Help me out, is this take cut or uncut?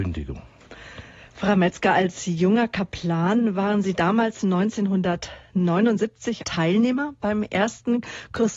cut